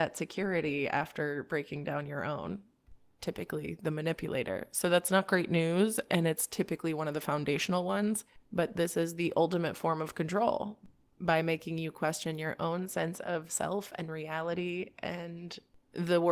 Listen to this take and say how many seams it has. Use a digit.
0